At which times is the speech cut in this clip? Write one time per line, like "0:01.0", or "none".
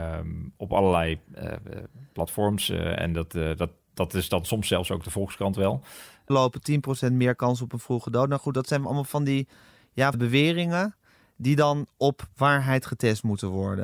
0:06.3
0:10.1